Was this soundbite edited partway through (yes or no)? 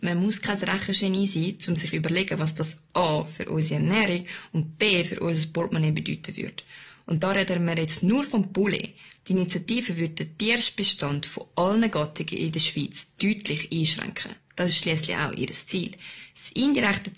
no